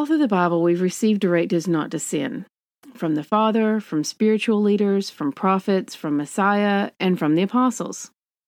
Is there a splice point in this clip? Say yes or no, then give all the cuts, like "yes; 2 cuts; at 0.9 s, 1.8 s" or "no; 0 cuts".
no; 0 cuts